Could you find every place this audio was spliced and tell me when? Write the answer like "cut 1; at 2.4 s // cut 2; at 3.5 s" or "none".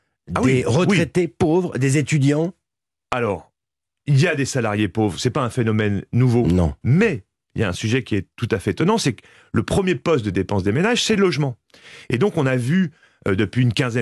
cut 1; at 6.8 s